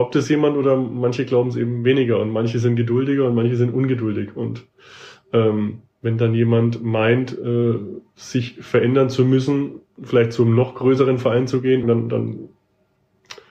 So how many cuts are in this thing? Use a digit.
2